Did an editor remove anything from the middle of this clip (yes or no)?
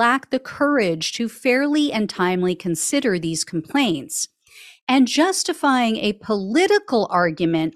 no